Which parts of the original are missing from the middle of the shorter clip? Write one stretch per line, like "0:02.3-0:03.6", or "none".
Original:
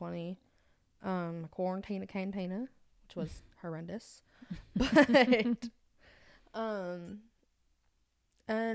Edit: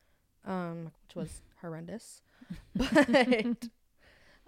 0:01.5-0:02.9